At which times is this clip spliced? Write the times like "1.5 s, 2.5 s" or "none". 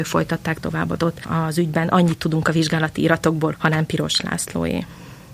1.0 s, 3.5 s